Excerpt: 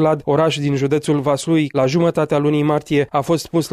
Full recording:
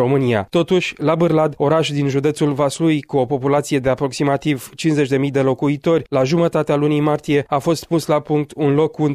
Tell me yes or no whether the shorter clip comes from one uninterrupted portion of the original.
no